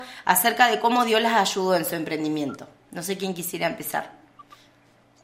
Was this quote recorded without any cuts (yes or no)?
yes